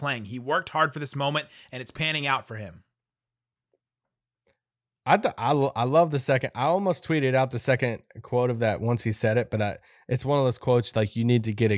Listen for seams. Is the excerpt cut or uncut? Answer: uncut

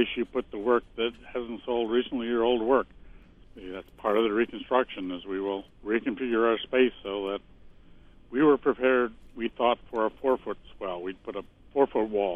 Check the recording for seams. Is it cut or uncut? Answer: cut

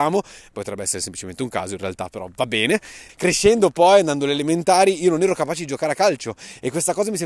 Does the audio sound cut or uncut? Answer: cut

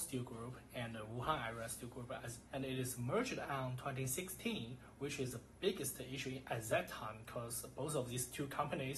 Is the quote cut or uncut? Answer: cut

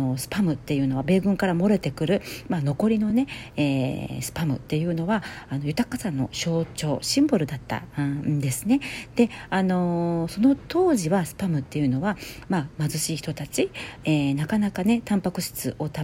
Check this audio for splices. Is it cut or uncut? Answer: uncut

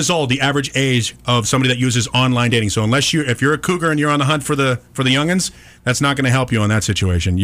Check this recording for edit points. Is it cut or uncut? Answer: uncut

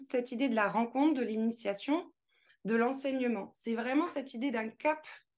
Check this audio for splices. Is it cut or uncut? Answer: uncut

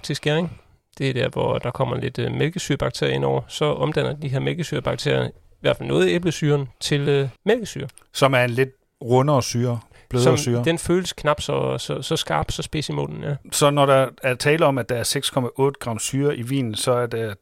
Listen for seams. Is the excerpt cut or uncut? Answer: cut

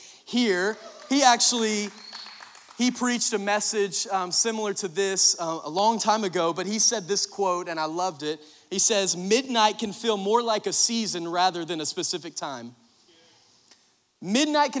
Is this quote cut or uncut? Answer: uncut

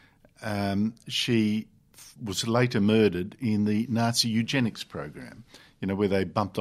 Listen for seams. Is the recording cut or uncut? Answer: uncut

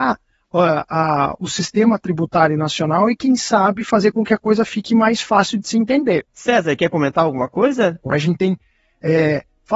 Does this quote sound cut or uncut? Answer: cut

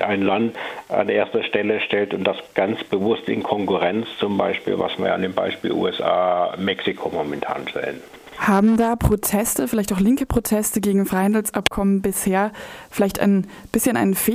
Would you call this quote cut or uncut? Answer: uncut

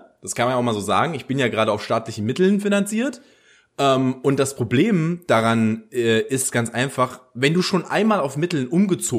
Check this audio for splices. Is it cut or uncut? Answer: uncut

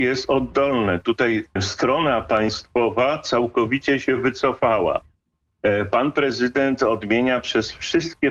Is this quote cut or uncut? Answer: cut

